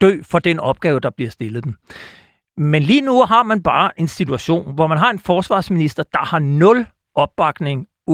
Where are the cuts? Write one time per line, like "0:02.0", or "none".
none